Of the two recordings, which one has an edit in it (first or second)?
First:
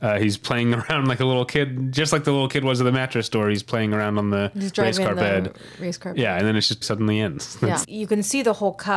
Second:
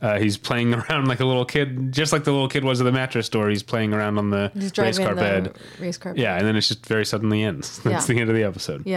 first